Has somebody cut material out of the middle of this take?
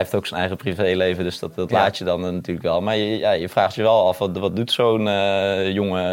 no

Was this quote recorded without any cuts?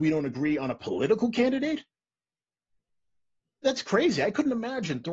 no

